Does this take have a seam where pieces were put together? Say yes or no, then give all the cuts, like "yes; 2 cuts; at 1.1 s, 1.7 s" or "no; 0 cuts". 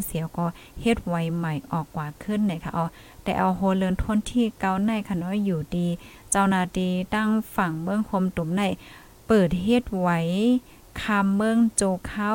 no; 0 cuts